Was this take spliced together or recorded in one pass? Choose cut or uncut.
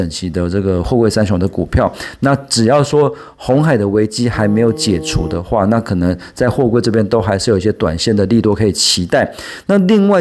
uncut